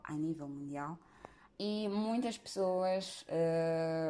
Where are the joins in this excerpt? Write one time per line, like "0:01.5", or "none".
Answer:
0:01.5

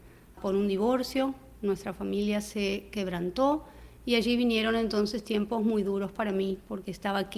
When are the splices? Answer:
none

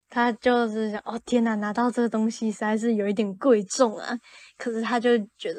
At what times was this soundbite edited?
none

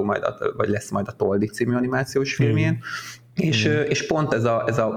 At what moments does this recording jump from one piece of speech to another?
0:03.3

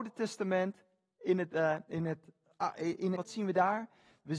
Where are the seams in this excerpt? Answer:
0:03.1

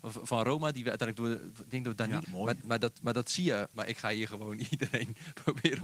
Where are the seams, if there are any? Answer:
0:02.2
0:03.7

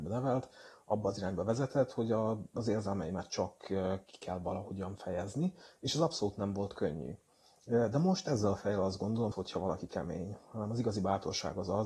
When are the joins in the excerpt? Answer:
0:09.3

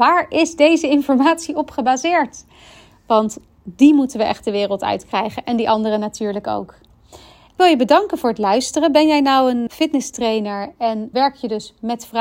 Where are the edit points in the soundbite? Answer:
0:09.7
0:11.1

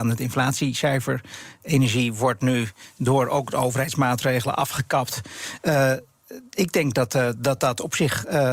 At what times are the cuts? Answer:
none

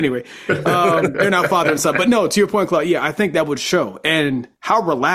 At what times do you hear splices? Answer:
none

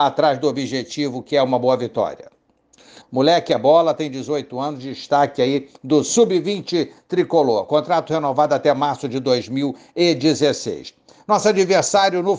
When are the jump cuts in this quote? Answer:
0:03.0

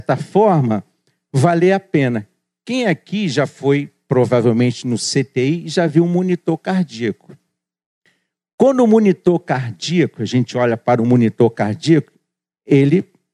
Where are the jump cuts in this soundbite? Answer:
none

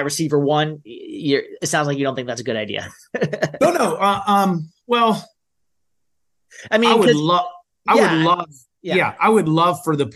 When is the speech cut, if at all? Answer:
none

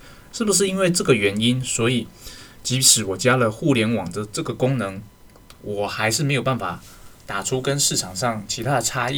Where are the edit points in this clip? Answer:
none

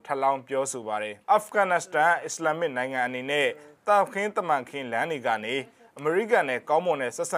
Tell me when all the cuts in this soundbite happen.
0:01.2

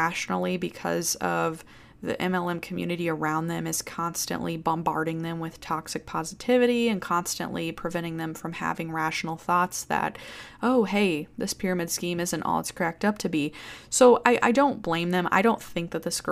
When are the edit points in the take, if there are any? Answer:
none

